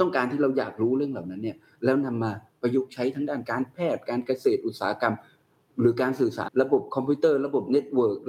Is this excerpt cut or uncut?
cut